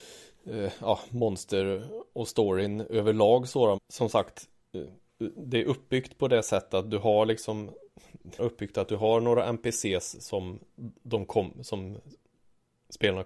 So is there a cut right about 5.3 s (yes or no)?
no